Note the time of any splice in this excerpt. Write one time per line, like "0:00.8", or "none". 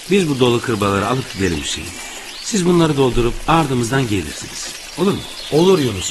none